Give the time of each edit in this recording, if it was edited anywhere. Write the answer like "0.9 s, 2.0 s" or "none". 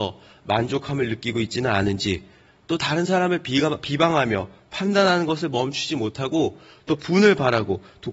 none